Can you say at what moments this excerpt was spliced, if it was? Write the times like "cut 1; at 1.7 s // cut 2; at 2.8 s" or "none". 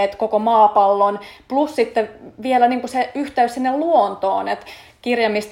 none